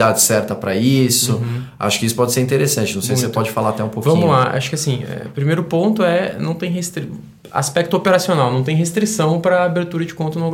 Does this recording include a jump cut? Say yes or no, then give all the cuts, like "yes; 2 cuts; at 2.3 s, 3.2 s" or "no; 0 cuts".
no; 0 cuts